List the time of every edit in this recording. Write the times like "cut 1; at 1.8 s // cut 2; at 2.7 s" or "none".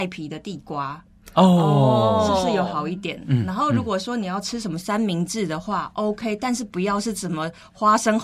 none